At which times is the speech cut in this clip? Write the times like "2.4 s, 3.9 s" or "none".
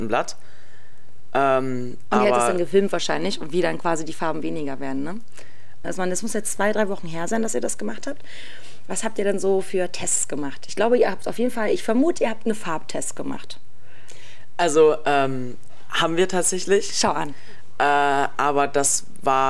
5.8 s